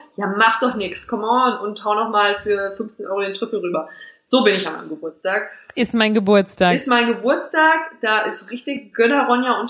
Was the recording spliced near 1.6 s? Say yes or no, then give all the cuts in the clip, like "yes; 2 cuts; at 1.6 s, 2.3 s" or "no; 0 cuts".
no; 0 cuts